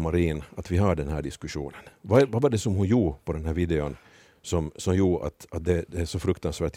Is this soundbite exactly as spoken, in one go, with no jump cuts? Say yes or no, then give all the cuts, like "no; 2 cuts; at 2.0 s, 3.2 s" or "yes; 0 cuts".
yes; 0 cuts